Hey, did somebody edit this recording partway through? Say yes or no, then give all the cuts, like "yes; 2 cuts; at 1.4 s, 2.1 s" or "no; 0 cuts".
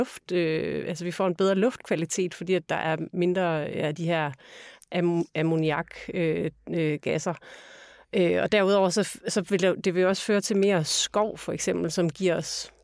no; 0 cuts